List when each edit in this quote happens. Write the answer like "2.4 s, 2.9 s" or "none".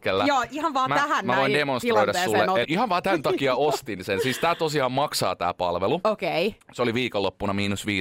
2.6 s